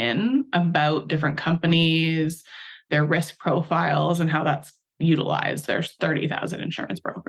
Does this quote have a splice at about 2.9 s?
no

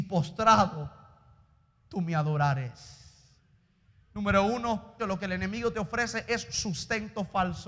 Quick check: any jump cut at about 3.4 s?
no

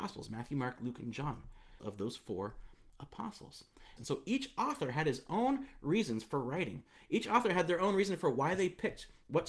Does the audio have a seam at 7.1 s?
no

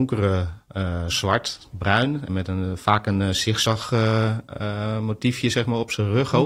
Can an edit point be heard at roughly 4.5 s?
no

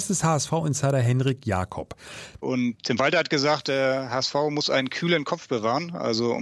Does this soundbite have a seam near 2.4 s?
yes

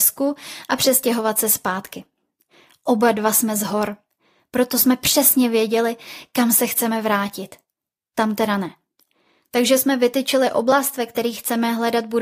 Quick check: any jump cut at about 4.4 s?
no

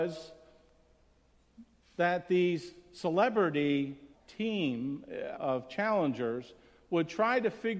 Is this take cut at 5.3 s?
yes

